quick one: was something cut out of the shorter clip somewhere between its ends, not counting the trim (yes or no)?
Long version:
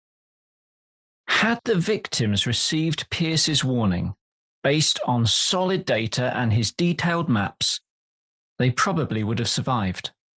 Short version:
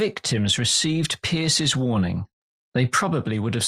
yes